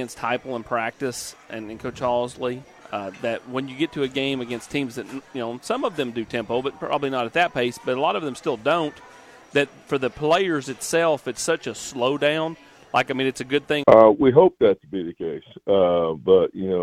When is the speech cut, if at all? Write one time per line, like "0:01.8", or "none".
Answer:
0:13.8